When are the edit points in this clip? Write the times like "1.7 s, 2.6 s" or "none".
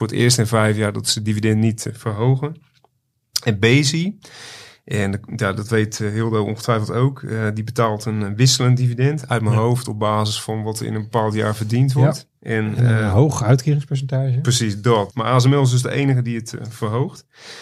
12.4 s, 15.1 s